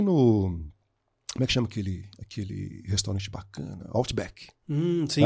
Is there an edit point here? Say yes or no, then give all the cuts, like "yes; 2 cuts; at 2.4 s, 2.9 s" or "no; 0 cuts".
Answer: no; 0 cuts